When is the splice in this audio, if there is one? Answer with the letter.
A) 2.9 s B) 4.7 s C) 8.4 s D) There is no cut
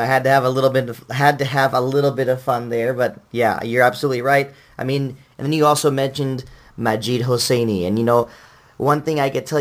D